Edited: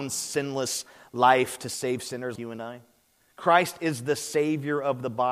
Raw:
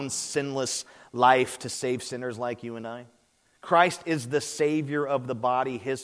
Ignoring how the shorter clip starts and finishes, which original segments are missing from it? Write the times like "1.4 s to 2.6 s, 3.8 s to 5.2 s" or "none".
2.4 s to 2.6 s